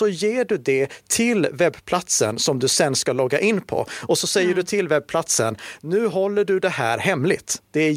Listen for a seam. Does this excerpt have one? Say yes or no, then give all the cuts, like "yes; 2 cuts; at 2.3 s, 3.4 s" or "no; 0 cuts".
no; 0 cuts